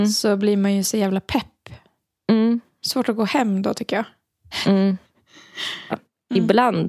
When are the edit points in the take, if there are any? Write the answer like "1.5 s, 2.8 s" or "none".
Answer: 5.9 s